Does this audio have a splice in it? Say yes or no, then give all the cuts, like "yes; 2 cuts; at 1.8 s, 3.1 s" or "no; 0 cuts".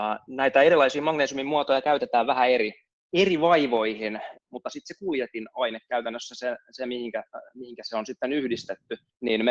yes; 1 cut; at 4.3 s